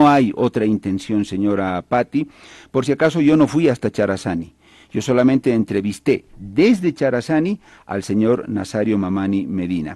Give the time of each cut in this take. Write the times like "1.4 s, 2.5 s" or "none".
none